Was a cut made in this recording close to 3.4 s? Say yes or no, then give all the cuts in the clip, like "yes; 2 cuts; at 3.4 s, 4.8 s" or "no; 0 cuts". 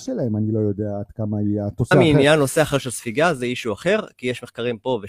no; 1 cut; at 1.9 s